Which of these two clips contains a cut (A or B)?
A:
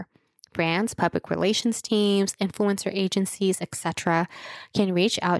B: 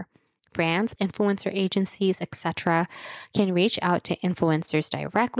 B